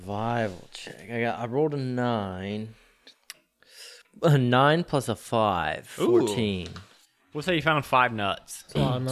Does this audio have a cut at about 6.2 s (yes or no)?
no